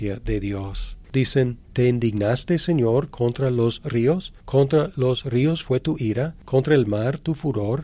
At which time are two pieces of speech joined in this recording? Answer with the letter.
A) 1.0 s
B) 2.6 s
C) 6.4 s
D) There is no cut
A